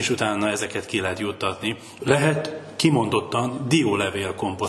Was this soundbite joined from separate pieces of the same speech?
yes; 1 cut; at 2.0 s

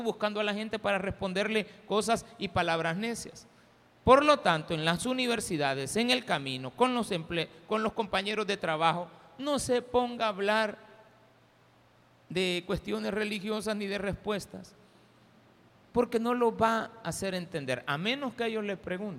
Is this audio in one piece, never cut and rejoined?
yes; 0 cuts

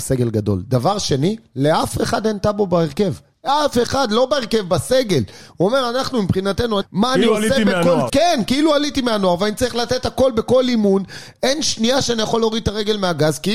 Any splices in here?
yes; 2 cuts; at 6.8 s, 8.1 s

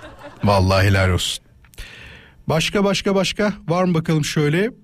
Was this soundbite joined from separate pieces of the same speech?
no; 0 cuts

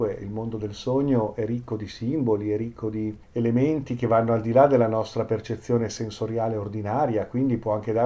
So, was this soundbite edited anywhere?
yes; 1 cut; at 3.2 s

